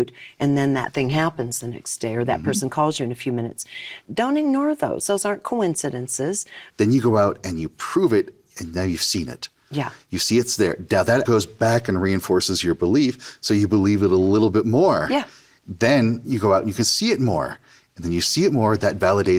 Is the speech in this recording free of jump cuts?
no; 2 cuts; at 6.7 s, 11.2 s

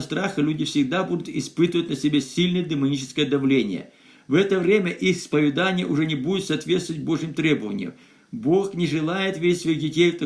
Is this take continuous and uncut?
yes; 0 cuts

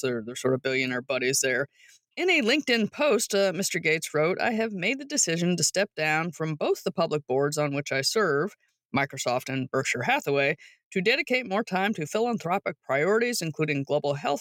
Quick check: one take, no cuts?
yes; 0 cuts

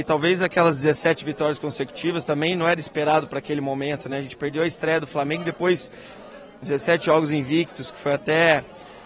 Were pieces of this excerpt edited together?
no; 0 cuts

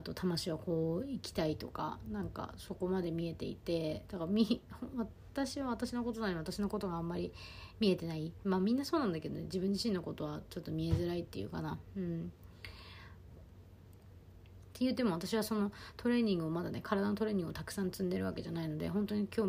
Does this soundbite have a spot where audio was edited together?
yes; 1 cut; at 13.4 s

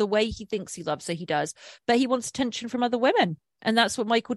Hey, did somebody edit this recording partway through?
no; 0 cuts

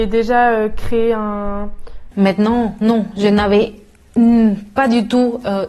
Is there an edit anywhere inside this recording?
yes; 1 cut; at 2.1 s

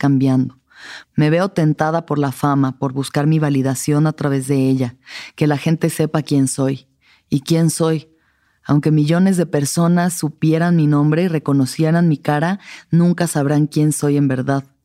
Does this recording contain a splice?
yes; 1 cut; at 1.0 s

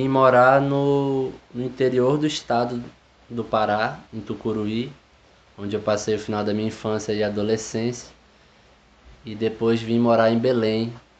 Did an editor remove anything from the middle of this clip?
no; 0 cuts

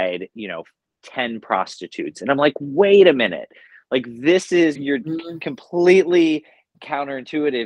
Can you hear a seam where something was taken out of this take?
yes; 1 cut; at 4.7 s

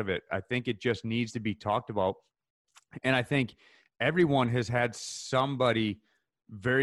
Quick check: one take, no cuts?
yes; 0 cuts

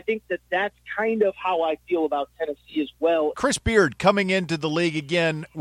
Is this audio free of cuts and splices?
no; 1 cut; at 3.3 s

